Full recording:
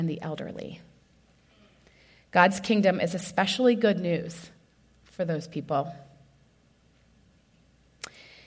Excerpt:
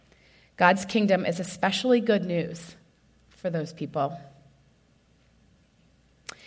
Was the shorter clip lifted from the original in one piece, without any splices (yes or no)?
yes